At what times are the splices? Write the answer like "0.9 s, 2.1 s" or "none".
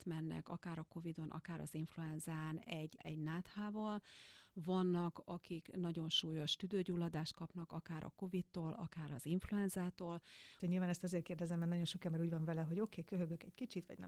3.0 s, 10.6 s